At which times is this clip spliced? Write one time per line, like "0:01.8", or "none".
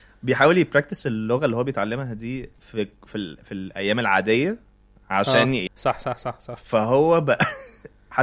0:05.7